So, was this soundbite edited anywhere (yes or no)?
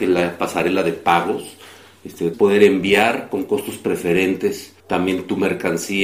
yes